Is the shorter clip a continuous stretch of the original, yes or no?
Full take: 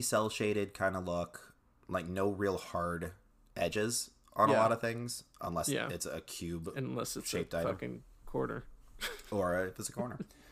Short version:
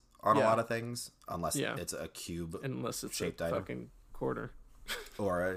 yes